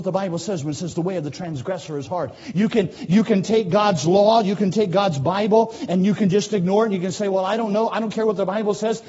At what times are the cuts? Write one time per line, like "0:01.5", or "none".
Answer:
none